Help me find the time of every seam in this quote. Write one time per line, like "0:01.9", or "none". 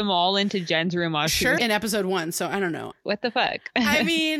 0:01.6
0:02.9